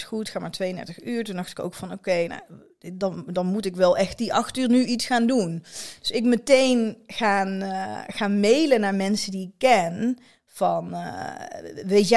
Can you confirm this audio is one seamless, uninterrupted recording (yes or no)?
yes